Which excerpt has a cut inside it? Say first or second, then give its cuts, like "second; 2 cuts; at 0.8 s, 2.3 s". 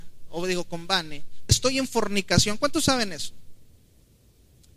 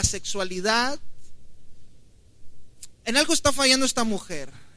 first; 1 cut; at 1.5 s